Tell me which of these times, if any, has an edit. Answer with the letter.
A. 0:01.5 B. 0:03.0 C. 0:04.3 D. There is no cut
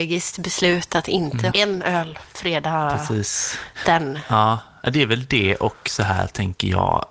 A